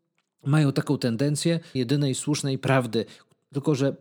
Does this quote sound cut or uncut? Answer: cut